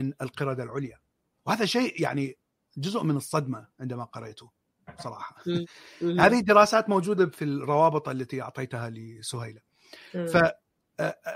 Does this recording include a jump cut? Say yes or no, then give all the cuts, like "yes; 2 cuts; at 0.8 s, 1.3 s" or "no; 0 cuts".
yes; 2 cuts; at 5.6 s, 7.3 s